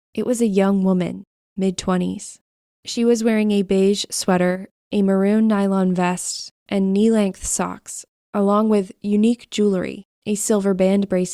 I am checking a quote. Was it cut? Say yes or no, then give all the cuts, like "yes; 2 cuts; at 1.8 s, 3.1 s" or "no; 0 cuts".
yes; 1 cut; at 10.2 s